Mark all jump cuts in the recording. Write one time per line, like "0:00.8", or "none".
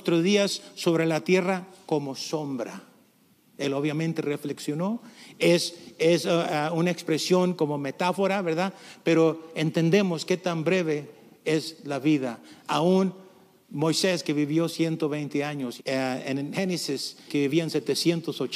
0:15.8
0:17.3